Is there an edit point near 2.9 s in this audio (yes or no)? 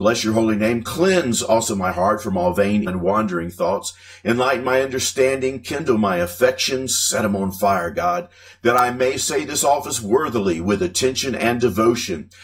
yes